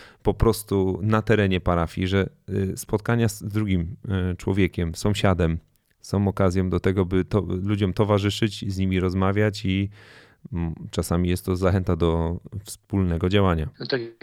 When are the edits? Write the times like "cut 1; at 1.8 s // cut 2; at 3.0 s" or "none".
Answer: none